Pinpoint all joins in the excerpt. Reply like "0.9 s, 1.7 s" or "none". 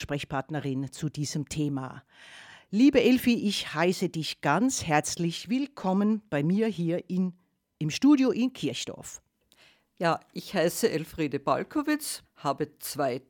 9.9 s, 12.2 s